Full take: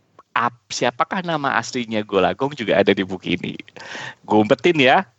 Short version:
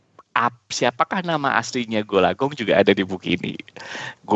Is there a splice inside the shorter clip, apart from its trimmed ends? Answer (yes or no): no